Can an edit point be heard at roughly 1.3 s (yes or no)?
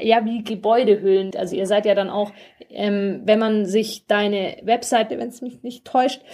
yes